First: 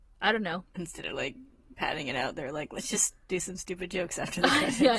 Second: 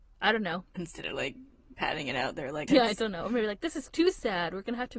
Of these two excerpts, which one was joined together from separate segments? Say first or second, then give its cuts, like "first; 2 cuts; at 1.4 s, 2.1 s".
second; 1 cut; at 2.7 s